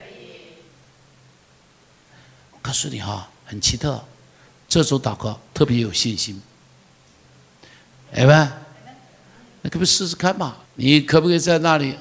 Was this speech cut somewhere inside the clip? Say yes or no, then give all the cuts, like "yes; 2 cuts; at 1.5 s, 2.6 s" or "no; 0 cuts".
yes; 2 cuts; at 8.1 s, 10.6 s